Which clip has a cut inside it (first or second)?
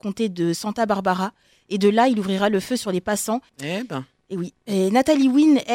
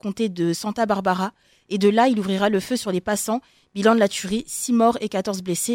first